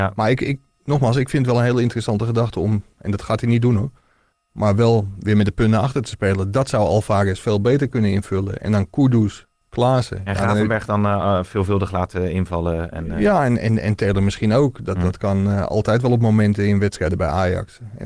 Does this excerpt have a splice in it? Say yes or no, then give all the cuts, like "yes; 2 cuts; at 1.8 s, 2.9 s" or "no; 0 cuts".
no; 0 cuts